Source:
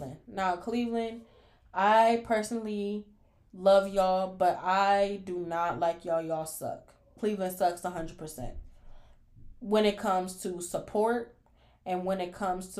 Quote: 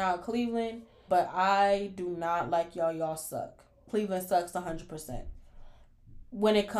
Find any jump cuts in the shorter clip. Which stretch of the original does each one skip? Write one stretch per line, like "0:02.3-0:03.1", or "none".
0:01.5-0:04.4